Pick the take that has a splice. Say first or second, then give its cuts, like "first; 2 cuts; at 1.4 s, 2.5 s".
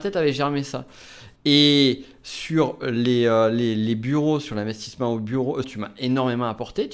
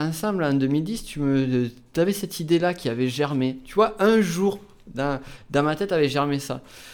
first; 2 cuts; at 1.4 s, 5.6 s